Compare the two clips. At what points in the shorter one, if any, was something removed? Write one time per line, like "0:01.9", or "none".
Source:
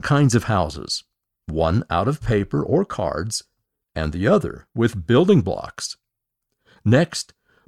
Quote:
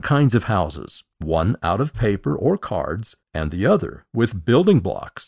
0:01.1
0:03.2